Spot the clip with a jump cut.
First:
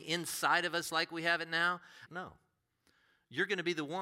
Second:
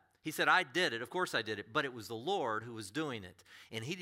first; 1 cut; at 2.1 s

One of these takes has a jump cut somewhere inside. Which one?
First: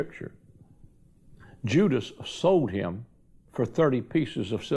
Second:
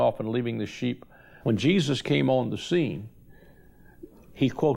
second; 1 cut; at 1.4 s

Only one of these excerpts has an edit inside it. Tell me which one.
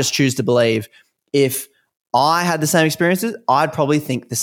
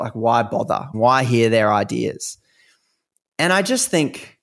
second; 1 cut; at 0.9 s

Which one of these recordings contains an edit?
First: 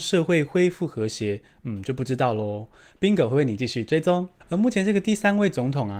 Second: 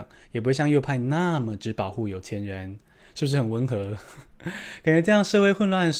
first; 1 cut; at 4.4 s

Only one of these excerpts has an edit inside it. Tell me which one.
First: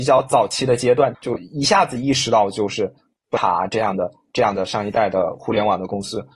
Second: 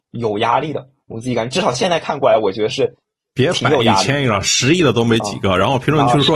first; 1 cut; at 1.1 s

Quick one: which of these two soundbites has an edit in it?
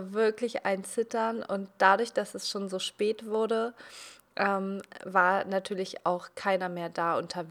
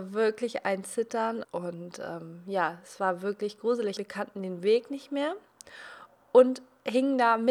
second; 2 cuts; at 1.4 s, 4.0 s

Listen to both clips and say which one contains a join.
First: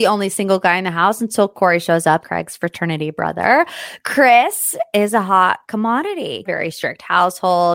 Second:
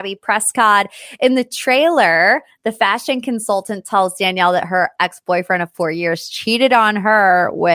first; 2 cuts; at 2.2 s, 6.5 s

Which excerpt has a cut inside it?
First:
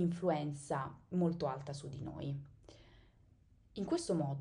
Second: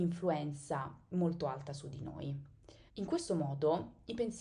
second; 1 cut; at 2.9 s

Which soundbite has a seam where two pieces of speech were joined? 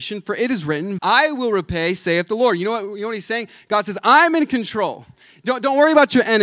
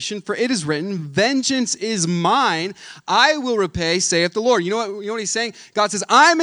first; 1 cut; at 1.0 s

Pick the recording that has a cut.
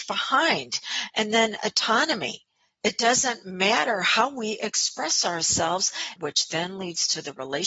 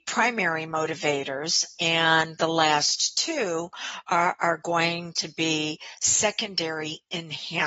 first; 1 cut; at 6.2 s

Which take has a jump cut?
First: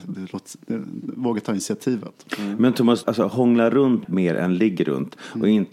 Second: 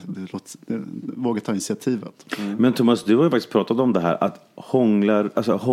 first; 2 cuts; at 3.0 s, 4.0 s

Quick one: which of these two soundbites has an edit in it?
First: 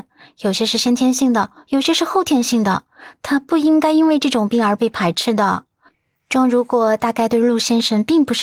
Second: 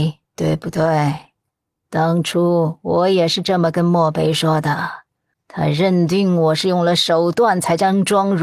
second; 1 cut; at 5.3 s

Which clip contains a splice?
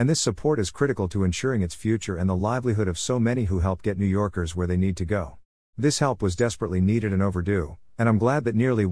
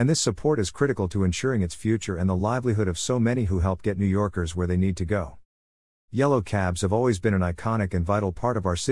first; 1 cut; at 5.7 s

